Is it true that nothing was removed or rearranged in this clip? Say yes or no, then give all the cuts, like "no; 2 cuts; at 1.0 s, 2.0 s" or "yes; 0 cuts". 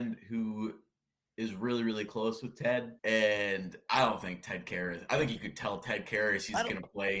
no; 1 cut; at 3.0 s